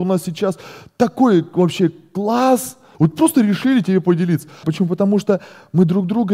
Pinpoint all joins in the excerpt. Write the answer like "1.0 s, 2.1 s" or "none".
2.9 s, 4.6 s